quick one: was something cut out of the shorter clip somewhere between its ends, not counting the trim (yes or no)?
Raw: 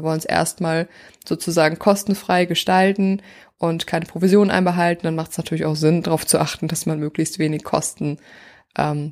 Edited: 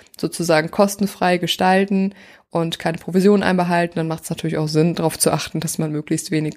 no